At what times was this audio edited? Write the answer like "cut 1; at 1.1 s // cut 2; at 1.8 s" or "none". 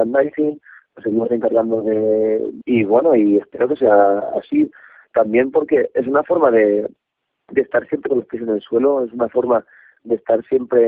cut 1; at 2.6 s